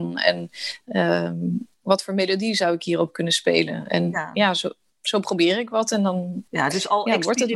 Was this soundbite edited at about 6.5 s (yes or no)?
yes